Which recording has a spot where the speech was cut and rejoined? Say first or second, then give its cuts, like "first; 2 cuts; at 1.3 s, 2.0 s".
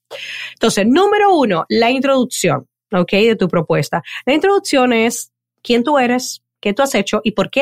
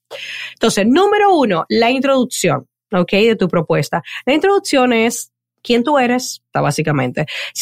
second; 1 cut; at 6.5 s